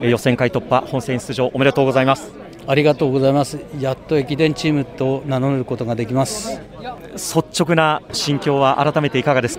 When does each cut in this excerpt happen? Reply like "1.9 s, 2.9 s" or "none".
none